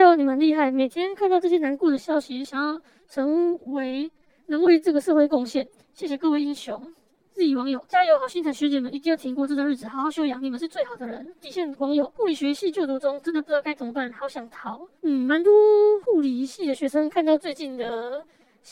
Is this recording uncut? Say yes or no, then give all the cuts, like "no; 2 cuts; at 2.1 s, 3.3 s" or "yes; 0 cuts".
no; 1 cut; at 2.4 s